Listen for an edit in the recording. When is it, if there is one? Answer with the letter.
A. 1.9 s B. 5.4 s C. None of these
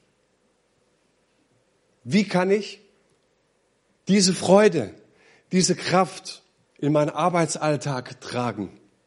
C